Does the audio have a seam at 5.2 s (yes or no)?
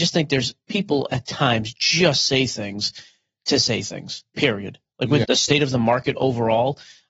yes